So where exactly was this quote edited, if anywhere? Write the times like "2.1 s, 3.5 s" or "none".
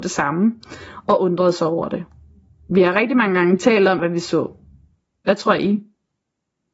4.0 s